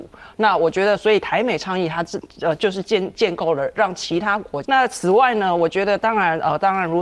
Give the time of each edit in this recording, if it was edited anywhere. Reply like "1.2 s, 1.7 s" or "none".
4.6 s